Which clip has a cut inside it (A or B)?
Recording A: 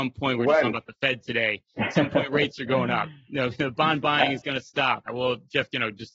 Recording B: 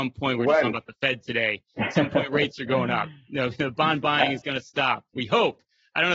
A